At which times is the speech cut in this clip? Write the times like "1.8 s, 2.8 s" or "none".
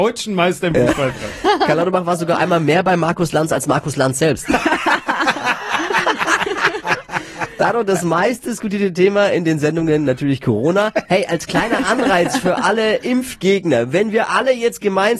none